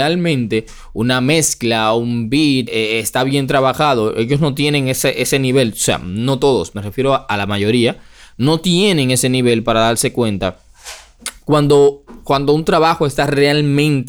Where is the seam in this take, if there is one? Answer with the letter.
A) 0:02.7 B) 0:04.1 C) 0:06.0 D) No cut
A